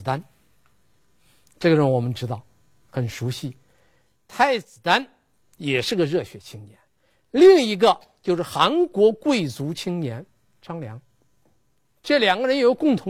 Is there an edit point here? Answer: no; 0 cuts

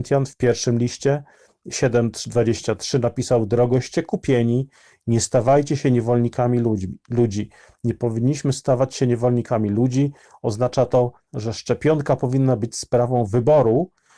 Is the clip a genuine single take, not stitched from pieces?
no; 1 cut; at 11.3 s

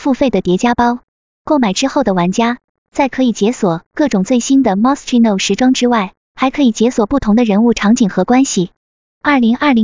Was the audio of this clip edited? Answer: no; 0 cuts

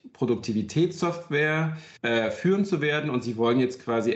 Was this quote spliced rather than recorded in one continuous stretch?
yes; 1 cut; at 2.0 s

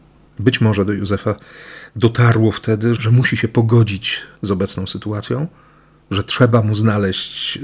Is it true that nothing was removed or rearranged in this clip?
no; 2 cuts; at 3.0 s, 4.3 s

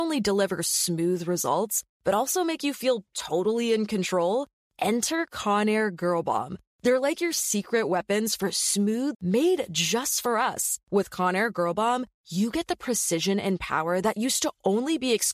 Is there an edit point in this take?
yes; 2 cuts; at 9.1 s, 10.8 s

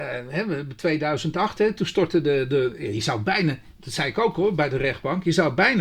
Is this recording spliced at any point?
no; 0 cuts

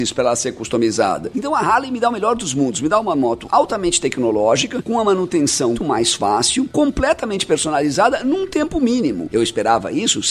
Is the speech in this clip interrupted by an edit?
yes; 2 cuts; at 5.8 s, 9.3 s

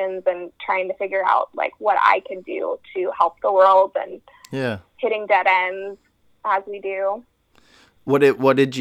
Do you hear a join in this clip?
no; 0 cuts

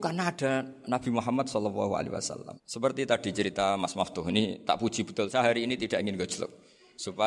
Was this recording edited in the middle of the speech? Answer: yes; 1 cut; at 2.6 s

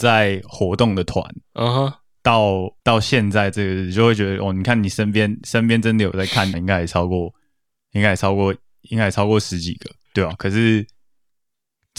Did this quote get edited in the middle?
yes; 3 cuts; at 2.8 s, 6.5 s, 10.1 s

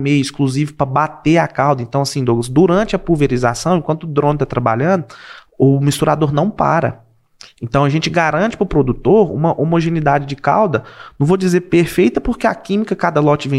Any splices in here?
no; 0 cuts

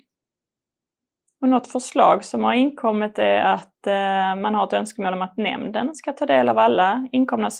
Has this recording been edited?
no; 0 cuts

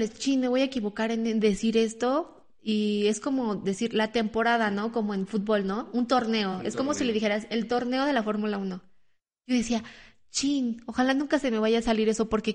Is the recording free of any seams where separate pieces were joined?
yes; 0 cuts

